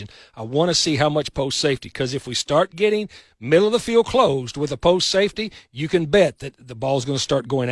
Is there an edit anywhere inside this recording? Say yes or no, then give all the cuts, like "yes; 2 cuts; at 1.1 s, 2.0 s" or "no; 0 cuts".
no; 0 cuts